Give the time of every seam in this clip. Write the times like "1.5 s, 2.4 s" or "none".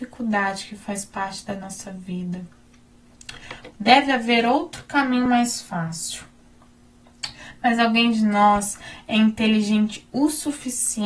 3.7 s